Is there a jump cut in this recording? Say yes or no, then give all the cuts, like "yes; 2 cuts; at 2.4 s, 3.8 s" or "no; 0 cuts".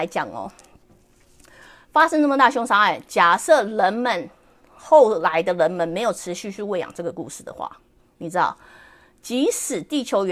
no; 0 cuts